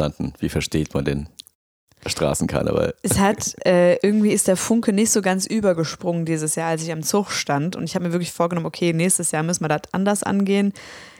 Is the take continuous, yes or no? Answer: yes